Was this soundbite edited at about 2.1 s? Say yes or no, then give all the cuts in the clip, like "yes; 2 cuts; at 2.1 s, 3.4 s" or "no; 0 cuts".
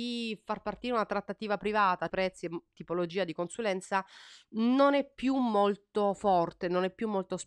yes; 1 cut; at 2.1 s